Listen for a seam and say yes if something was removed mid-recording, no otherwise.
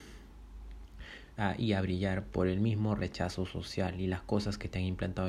yes